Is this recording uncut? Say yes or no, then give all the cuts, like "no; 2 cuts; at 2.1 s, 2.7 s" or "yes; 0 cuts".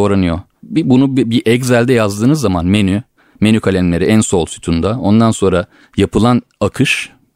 yes; 0 cuts